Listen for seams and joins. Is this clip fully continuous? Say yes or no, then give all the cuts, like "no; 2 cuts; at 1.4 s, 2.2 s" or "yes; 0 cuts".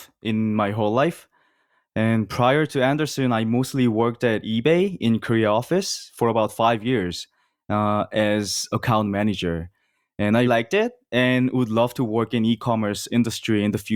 no; 1 cut; at 10.5 s